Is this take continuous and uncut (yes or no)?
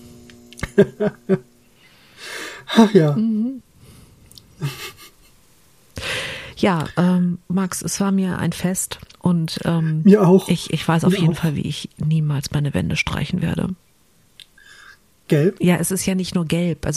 no